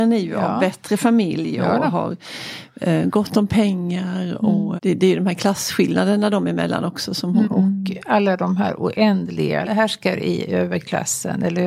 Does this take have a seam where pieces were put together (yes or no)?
yes